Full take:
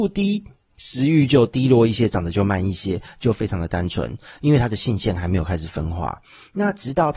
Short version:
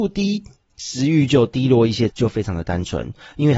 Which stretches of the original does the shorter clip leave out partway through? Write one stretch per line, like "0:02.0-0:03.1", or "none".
0:02.1-0:03.1